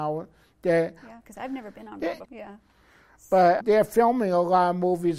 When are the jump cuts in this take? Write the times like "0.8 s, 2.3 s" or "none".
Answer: 1.2 s, 2.2 s, 3.6 s